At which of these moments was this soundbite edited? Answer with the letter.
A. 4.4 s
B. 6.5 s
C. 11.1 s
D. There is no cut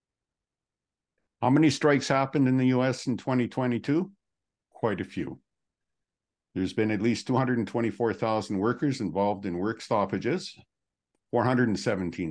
D